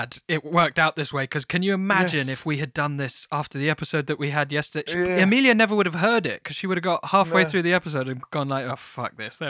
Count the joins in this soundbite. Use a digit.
0